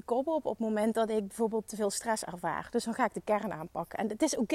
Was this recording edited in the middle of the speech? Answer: no; 0 cuts

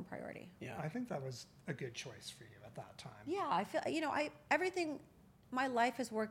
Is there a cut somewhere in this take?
no; 0 cuts

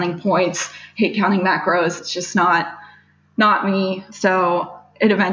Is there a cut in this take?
no; 0 cuts

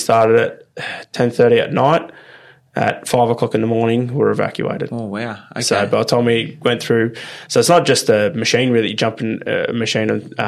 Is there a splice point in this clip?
no; 0 cuts

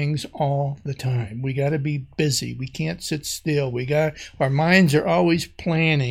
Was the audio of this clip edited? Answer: no; 0 cuts

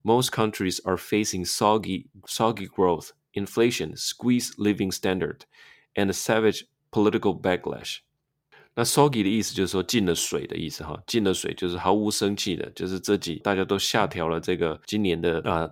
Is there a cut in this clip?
no; 0 cuts

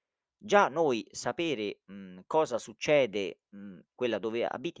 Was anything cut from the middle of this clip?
yes; 1 cut; at 3.9 s

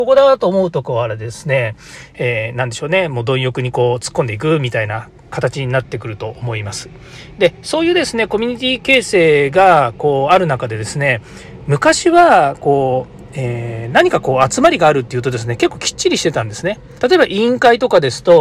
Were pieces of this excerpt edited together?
yes; 1 cut; at 17.0 s

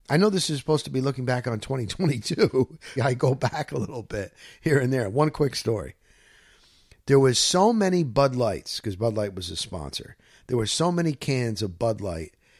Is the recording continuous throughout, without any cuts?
no; 1 cut; at 3.0 s

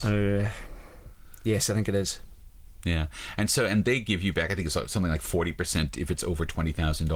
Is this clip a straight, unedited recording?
yes; 0 cuts

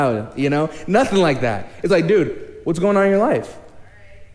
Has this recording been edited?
no; 0 cuts

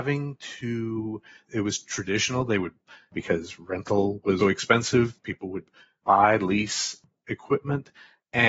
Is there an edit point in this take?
yes; 1 cut; at 4.4 s

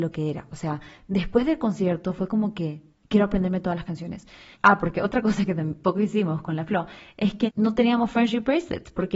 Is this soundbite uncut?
no; 2 cuts; at 4.5 s, 7.5 s

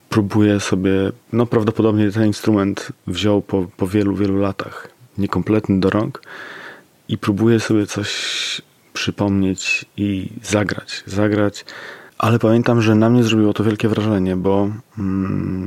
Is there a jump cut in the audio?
yes; 1 cut; at 12.1 s

